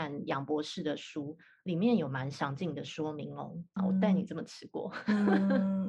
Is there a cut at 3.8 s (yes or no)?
yes